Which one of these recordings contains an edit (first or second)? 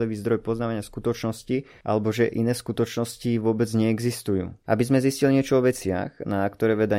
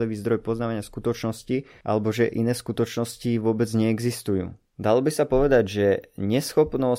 first